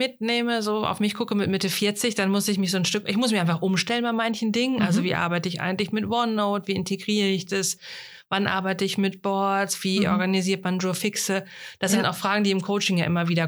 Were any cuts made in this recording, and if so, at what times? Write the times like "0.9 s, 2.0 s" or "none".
none